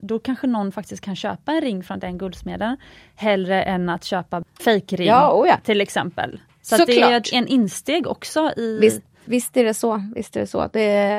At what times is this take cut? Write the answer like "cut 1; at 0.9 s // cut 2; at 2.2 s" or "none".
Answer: none